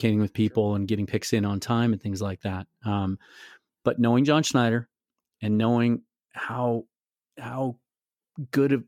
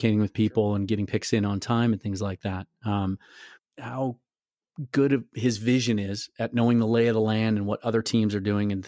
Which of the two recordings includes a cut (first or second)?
second